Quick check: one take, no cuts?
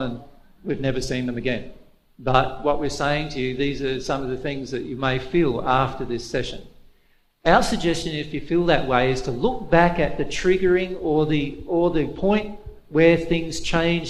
no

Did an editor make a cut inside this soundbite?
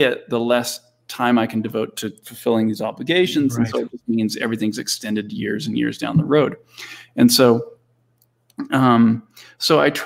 no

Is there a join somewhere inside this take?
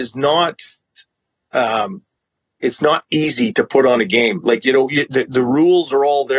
no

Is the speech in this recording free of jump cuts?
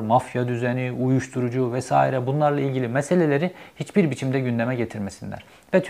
yes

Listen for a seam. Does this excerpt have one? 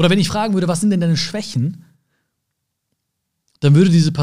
no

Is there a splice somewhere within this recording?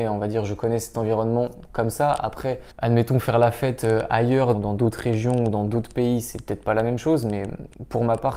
yes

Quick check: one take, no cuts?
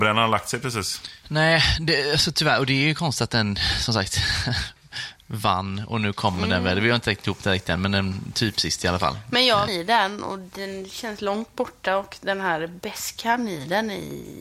no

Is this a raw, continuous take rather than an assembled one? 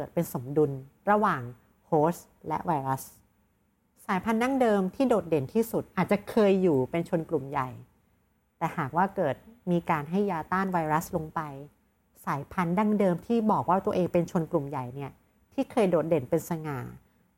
yes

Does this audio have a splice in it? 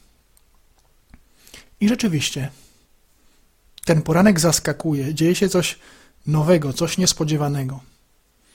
no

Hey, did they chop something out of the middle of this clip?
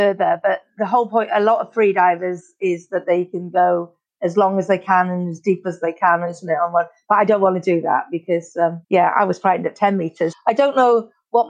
yes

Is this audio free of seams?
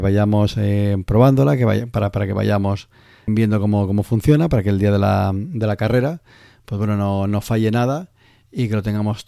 no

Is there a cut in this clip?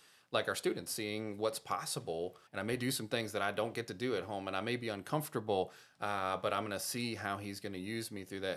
yes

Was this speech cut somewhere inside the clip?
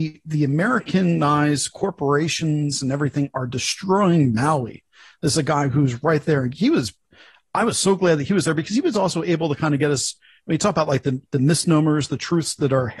no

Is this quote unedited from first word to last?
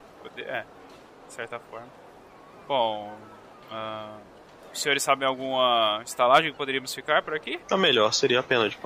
no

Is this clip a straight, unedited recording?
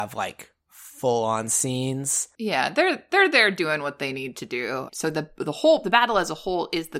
no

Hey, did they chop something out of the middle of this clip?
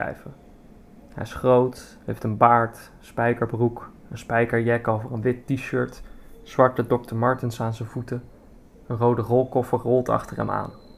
no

